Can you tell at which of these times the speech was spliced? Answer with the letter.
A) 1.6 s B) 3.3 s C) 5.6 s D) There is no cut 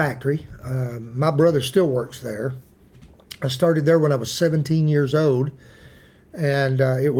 D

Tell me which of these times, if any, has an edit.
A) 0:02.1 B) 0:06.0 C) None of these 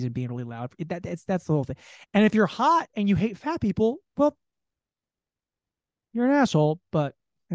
A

